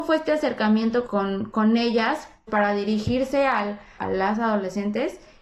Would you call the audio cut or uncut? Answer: cut